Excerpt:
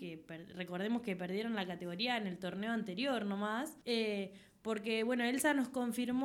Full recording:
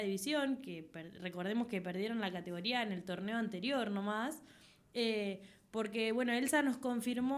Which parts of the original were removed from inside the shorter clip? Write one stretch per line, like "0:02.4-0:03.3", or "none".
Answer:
0:04.5-0:04.9

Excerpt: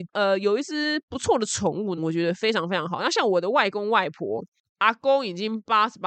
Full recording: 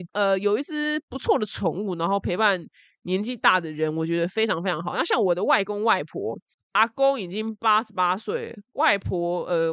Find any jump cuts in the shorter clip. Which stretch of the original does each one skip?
0:02.0-0:03.9

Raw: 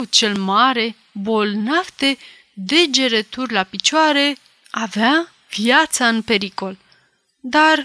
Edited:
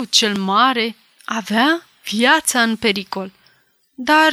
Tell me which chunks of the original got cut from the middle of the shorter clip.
0:01.1-0:04.5

